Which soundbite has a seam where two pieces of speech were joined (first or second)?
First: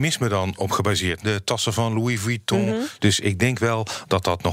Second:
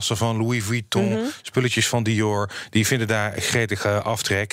first